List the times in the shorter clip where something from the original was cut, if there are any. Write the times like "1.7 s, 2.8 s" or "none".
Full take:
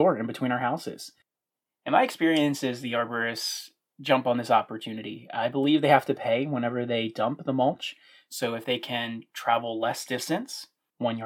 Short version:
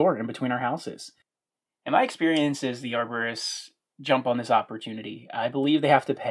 none